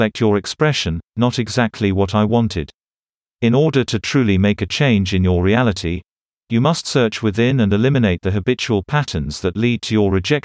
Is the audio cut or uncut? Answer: cut